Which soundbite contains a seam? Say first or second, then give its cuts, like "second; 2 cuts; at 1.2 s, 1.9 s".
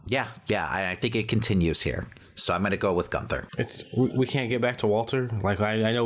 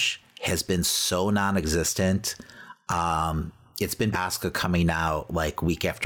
second; 1 cut; at 4.1 s